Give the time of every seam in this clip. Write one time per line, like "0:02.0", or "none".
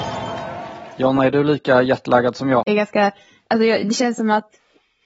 0:02.7